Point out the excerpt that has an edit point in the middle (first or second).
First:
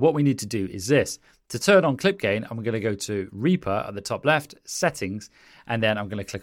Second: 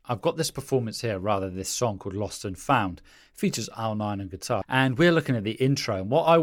second